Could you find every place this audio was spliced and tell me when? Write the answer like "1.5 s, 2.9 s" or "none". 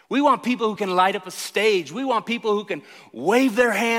none

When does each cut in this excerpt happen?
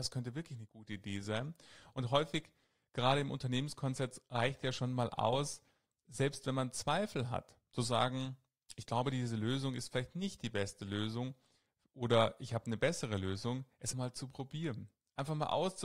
13.9 s

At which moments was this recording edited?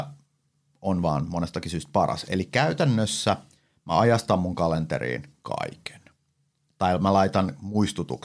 none

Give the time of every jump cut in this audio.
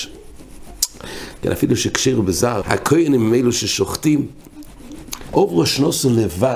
1.4 s, 2.6 s, 5.3 s

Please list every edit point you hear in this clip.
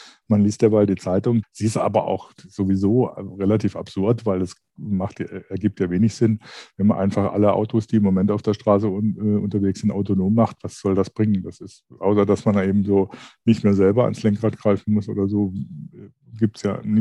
1.4 s

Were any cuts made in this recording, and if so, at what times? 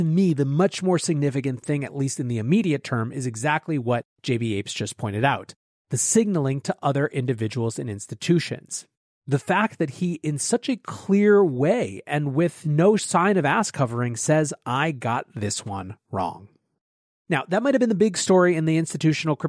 none

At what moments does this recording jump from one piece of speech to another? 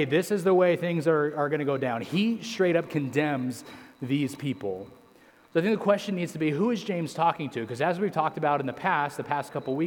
none

